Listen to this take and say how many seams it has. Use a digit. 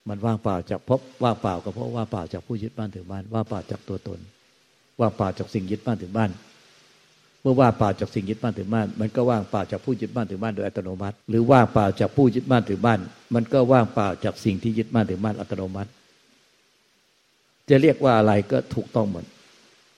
1